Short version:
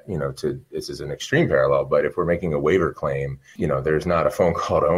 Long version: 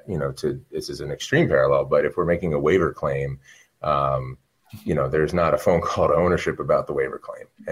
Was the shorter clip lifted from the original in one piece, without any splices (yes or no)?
no